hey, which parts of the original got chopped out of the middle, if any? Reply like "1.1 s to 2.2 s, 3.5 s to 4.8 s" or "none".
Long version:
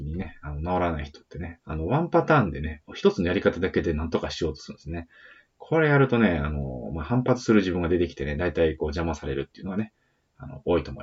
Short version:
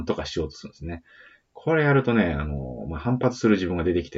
none